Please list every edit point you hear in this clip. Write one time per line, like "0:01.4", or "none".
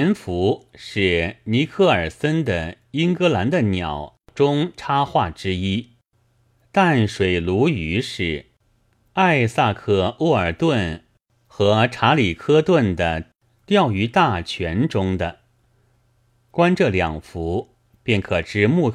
none